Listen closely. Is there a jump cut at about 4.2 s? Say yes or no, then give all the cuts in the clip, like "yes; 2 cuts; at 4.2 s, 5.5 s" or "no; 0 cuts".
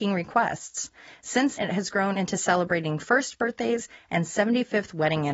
no; 1 cut; at 1.6 s